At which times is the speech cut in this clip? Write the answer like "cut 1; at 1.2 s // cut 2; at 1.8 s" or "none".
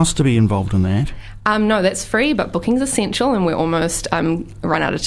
none